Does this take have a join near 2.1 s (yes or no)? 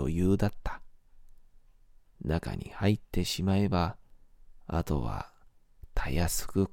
yes